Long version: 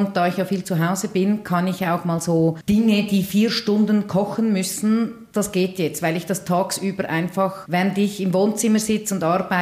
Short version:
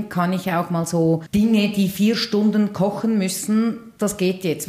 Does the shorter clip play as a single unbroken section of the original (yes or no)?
yes